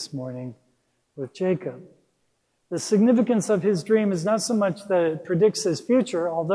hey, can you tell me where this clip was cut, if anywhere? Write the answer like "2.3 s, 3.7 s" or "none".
none